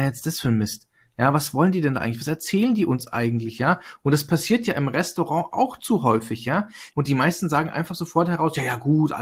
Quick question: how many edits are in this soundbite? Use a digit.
1